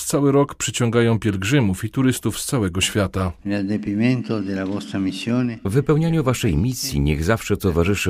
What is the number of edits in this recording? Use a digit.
0